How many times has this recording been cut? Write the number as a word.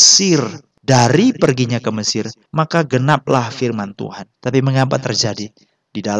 one